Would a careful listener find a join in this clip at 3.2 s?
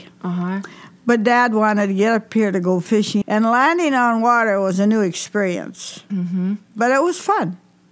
yes; 1 cut; at 3.2 s

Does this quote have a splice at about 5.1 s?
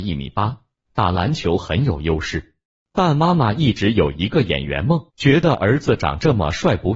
yes; 1 cut; at 5.1 s

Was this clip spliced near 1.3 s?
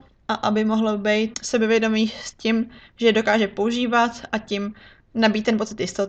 yes; 1 cut; at 1.3 s

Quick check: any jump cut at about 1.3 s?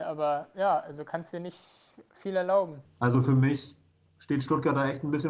no; 1 cut; at 2.8 s

